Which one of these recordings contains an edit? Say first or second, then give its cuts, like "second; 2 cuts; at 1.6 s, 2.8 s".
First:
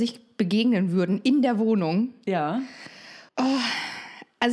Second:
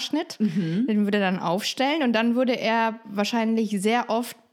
first; 1 cut; at 3.3 s